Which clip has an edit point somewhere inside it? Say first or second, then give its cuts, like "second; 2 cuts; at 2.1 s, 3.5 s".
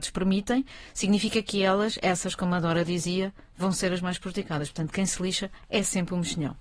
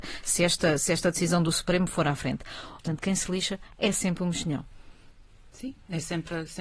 second; 1 cut; at 2.8 s